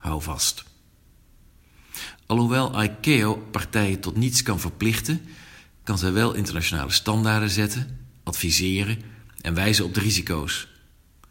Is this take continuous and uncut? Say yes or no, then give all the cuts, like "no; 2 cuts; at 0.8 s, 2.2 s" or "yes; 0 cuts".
no; 1 cut; at 2.1 s